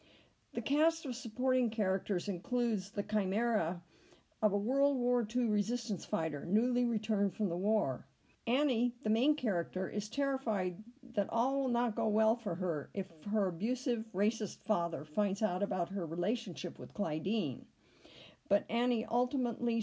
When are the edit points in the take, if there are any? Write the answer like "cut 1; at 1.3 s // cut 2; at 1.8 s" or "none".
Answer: cut 1; at 8.3 s